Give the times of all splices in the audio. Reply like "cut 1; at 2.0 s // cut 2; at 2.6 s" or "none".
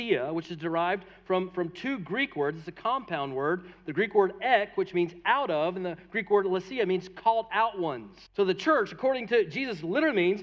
cut 1; at 8.3 s